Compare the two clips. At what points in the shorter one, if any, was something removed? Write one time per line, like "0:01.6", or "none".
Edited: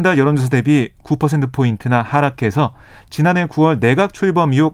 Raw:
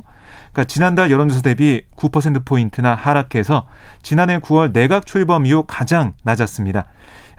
none